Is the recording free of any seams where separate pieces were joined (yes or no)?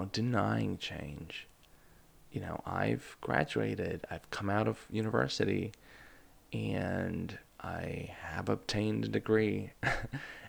yes